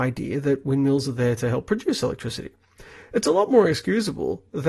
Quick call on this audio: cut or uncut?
uncut